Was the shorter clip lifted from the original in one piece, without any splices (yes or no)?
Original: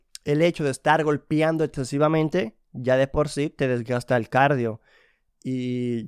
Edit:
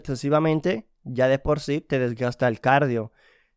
yes